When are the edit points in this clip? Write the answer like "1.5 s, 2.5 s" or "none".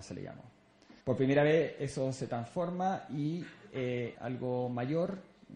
1.0 s, 4.1 s